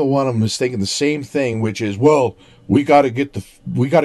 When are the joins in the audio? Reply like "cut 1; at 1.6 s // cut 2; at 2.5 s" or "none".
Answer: none

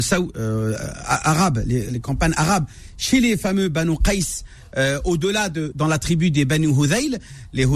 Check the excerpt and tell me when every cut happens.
cut 1; at 5.7 s

